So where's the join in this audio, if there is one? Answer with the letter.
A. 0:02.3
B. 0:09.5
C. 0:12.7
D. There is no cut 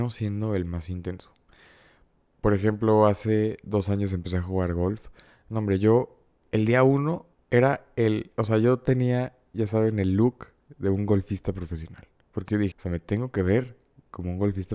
C